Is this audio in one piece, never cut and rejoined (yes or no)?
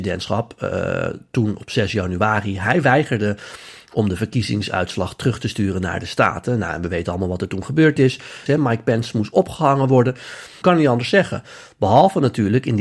no